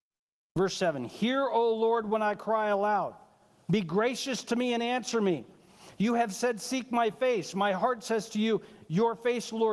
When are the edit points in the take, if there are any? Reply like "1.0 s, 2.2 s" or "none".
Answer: none